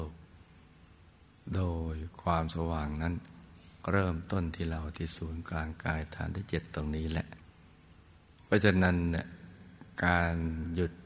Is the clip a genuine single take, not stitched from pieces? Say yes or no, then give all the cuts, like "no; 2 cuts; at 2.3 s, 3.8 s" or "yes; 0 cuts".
yes; 0 cuts